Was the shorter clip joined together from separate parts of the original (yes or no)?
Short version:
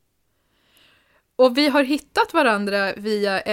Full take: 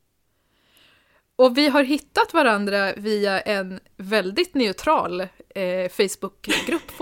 no